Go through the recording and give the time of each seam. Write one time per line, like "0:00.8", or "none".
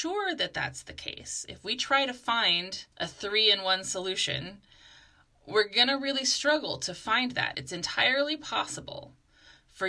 0:02.9
0:07.5

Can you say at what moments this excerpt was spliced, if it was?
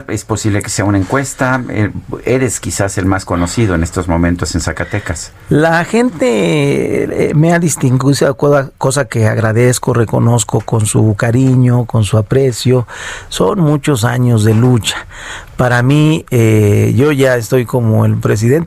none

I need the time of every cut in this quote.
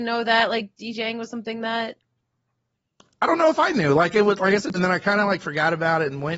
0:04.7

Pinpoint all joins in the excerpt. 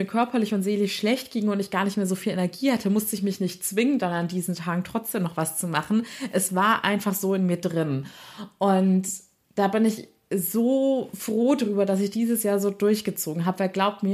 none

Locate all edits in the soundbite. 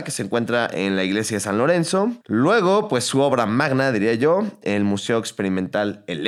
0:02.2

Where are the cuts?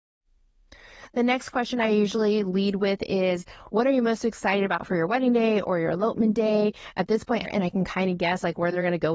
0:07.4

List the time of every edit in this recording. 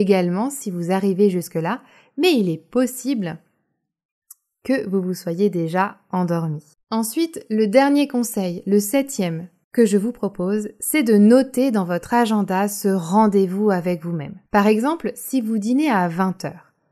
0:14.4

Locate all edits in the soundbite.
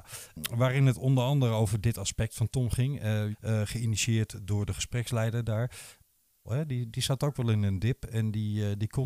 0:03.3
0:06.4

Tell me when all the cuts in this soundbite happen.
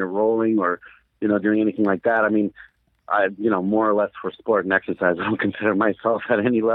none

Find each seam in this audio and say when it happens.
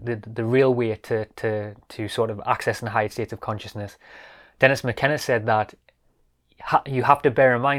none

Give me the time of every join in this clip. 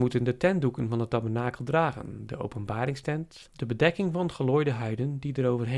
0:03.5

